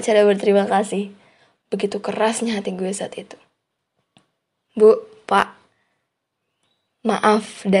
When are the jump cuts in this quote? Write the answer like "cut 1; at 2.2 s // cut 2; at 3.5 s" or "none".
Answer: cut 1; at 1.6 s